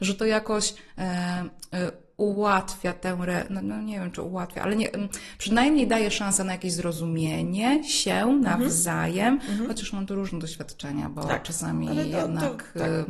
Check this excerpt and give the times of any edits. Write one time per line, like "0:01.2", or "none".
none